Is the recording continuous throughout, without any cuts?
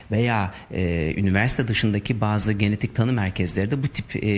yes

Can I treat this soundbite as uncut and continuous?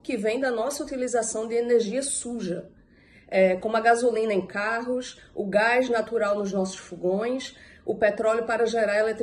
yes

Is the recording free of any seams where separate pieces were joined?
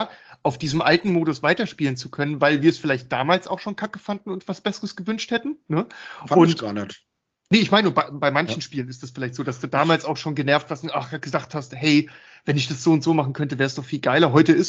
yes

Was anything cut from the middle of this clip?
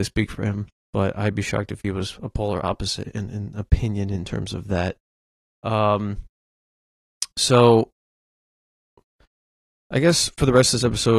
no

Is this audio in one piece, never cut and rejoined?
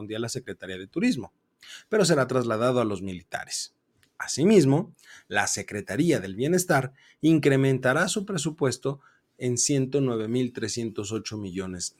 yes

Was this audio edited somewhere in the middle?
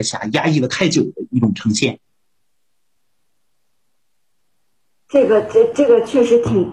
no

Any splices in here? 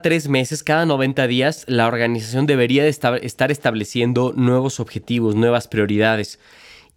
no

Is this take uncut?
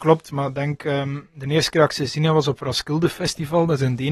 yes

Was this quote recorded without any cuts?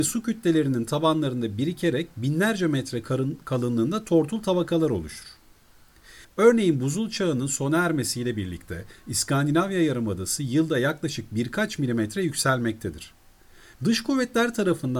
no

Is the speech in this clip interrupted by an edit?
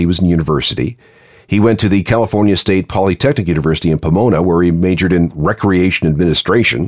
no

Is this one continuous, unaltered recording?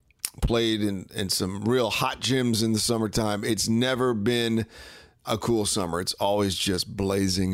no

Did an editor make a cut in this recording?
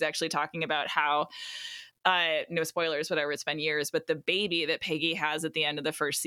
no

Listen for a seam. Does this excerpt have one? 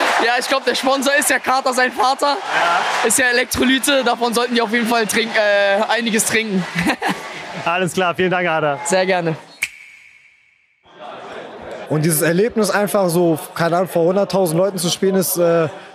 yes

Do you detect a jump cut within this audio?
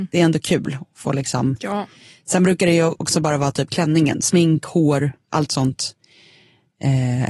no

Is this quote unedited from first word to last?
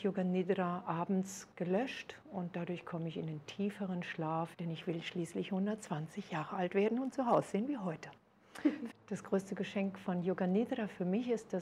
no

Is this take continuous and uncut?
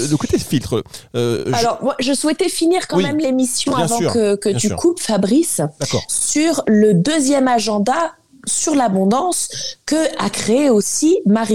yes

